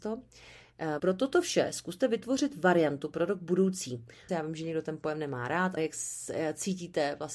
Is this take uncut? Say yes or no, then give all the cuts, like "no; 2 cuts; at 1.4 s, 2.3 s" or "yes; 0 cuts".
no; 3 cuts; at 1.0 s, 4.3 s, 5.8 s